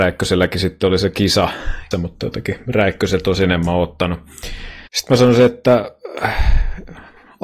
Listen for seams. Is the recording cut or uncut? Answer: cut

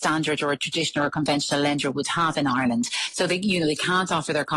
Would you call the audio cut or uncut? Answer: uncut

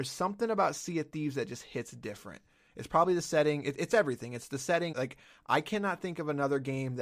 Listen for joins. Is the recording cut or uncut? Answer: cut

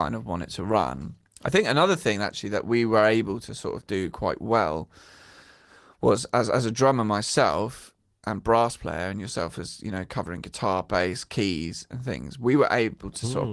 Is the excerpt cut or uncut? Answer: uncut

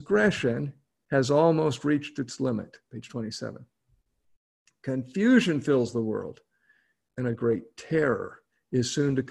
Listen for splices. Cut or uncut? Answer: cut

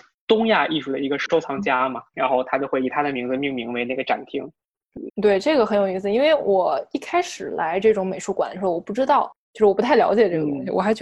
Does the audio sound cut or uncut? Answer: cut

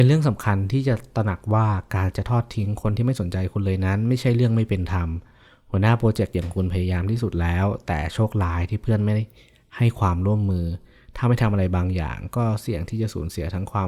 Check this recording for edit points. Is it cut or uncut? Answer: uncut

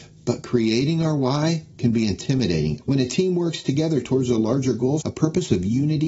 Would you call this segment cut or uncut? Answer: cut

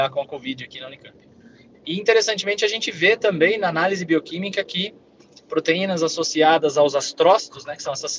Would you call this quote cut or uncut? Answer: cut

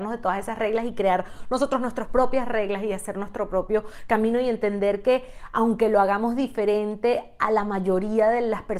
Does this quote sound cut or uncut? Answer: uncut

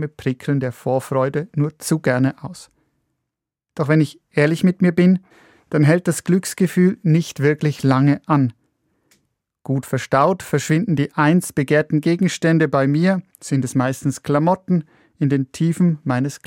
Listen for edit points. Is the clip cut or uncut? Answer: uncut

